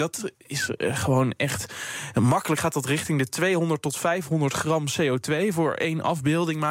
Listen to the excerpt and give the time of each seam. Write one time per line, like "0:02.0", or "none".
none